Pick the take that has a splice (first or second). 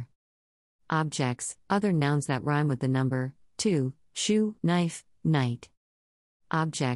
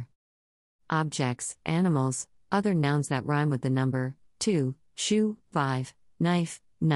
first